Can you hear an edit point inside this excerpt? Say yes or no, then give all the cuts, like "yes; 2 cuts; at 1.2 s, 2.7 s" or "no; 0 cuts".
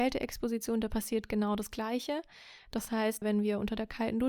yes; 1 cut; at 3.2 s